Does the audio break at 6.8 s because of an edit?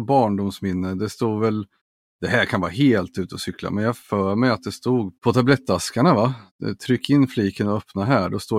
no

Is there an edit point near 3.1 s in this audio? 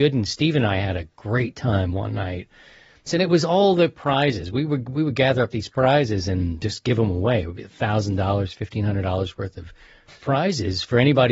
yes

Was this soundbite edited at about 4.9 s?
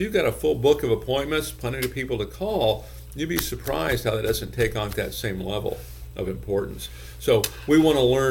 yes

